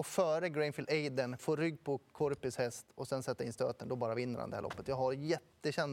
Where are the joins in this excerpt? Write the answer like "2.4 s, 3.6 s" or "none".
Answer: 1.4 s

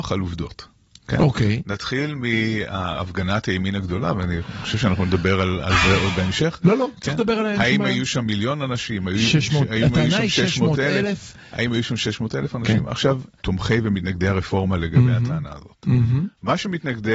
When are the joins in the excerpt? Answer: 13.4 s

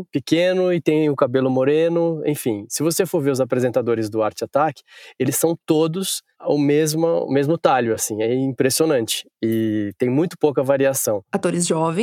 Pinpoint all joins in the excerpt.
none

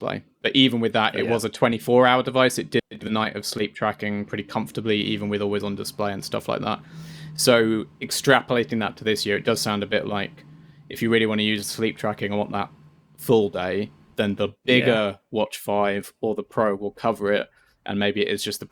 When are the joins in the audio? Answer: none

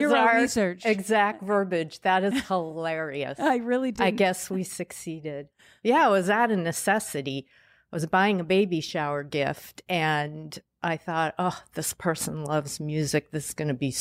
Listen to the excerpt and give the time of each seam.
none

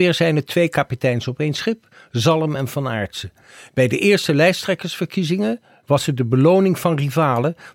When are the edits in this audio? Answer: 5.8 s

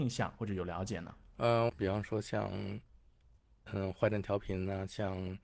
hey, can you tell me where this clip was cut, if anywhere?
1.7 s

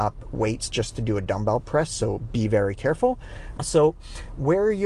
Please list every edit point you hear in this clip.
3.6 s

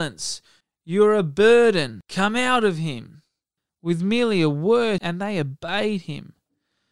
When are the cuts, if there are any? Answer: 3.7 s, 5.0 s

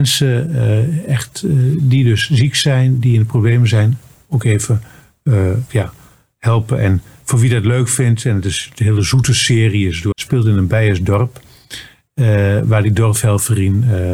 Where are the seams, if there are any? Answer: 10.1 s

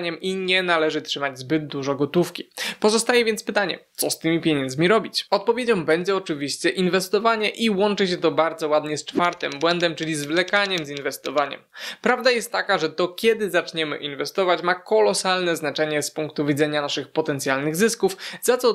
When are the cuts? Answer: none

